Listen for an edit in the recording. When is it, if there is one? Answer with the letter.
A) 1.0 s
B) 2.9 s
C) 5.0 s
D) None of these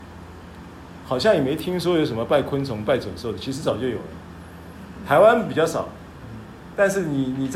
A